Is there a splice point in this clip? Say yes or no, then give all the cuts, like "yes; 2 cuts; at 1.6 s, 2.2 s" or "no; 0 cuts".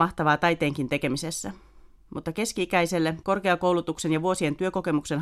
yes; 1 cut; at 3.2 s